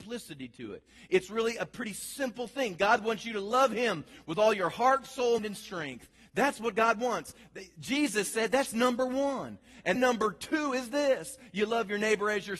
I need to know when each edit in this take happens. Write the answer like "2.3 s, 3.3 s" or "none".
5.4 s, 10.0 s